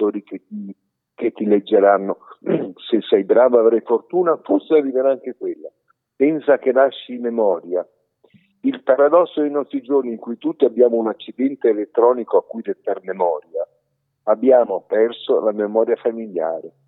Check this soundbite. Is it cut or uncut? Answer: uncut